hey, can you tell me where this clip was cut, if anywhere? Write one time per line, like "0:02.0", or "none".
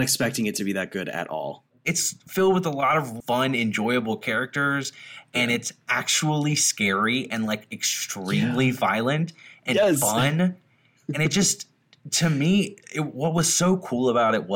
0:03.2